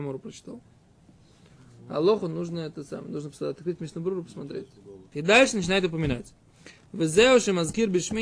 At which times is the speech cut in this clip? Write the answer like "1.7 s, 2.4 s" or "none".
5.1 s